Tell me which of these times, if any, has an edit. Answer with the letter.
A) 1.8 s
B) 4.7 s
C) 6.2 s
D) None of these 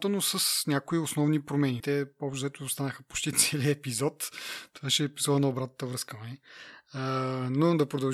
A